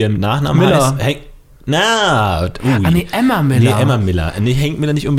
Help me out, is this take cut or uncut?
uncut